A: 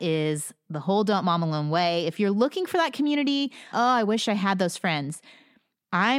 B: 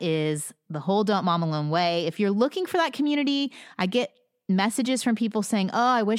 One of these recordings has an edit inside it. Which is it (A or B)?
A